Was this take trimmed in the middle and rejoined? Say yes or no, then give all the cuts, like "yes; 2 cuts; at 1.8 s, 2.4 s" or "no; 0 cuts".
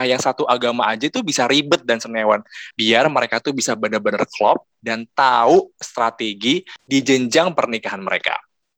yes; 1 cut; at 2.7 s